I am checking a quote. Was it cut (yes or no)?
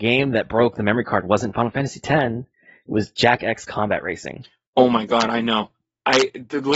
no